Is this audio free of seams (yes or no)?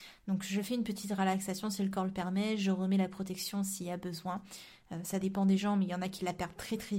yes